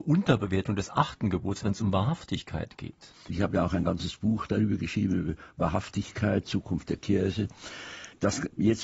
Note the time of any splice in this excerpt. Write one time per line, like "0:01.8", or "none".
0:03.3